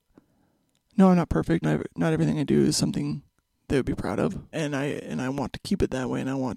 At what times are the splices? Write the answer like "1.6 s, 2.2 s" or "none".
1.6 s, 4.5 s